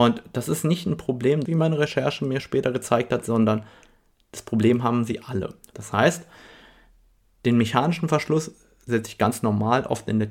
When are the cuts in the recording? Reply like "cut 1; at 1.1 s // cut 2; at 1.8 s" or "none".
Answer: cut 1; at 1.5 s // cut 2; at 5.7 s

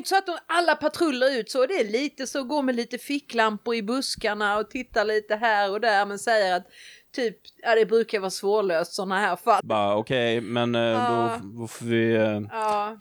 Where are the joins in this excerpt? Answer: cut 1; at 9.6 s

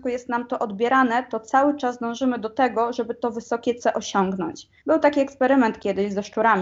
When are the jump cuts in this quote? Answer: cut 1; at 4.8 s

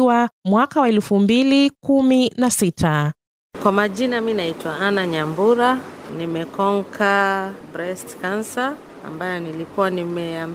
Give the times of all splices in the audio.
cut 1; at 6.1 s

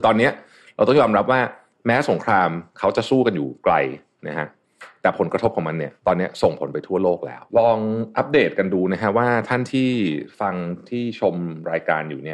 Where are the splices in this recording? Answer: cut 1; at 6.0 s // cut 2; at 7.5 s

